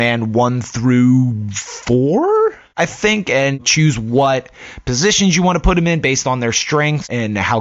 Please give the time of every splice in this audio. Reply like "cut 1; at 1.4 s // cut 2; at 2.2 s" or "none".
none